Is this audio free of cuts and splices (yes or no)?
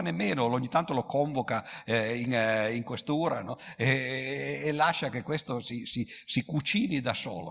yes